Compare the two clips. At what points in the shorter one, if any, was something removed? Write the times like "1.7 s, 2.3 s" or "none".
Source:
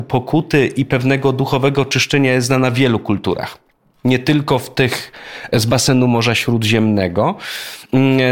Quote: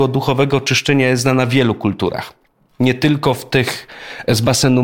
none